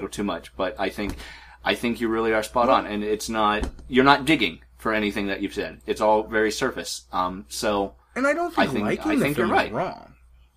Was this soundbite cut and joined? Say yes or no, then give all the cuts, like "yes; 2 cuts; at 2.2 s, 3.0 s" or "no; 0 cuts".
no; 0 cuts